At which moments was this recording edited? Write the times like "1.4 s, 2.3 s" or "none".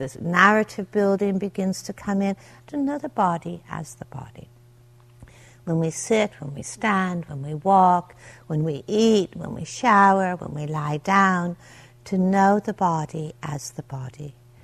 2.6 s